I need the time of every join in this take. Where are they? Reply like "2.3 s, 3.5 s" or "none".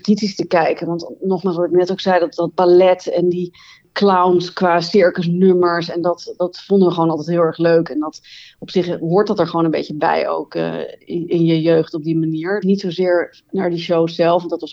12.6 s